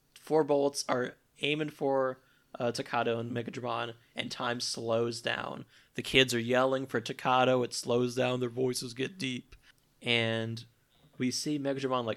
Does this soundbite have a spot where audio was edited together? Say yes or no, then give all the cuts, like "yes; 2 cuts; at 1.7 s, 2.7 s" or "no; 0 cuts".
no; 0 cuts